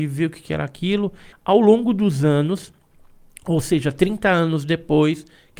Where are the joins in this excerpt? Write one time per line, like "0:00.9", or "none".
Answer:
0:01.3